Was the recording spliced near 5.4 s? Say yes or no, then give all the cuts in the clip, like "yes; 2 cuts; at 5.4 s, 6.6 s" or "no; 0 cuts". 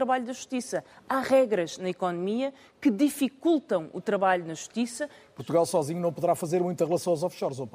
yes; 1 cut; at 5.4 s